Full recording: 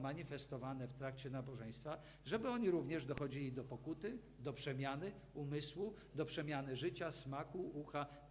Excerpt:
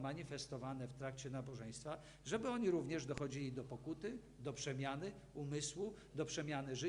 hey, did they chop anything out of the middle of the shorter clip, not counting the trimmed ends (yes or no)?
no